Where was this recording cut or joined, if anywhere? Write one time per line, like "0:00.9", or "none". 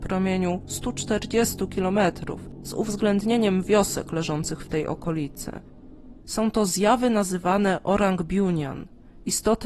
0:06.2